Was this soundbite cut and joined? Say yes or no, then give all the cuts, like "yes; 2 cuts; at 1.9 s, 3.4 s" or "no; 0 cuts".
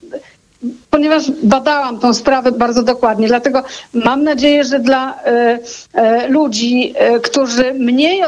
yes; 1 cut; at 2.5 s